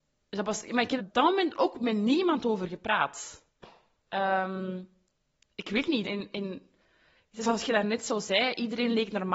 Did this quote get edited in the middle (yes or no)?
yes